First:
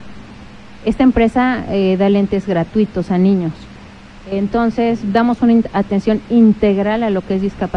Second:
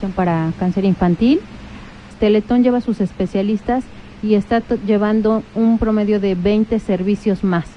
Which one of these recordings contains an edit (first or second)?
second